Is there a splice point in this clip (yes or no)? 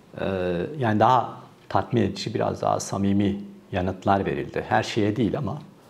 no